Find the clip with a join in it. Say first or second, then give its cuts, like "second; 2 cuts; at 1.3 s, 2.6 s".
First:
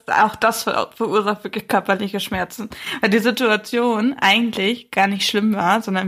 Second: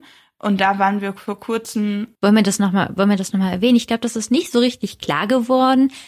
second; 1 cut; at 2.1 s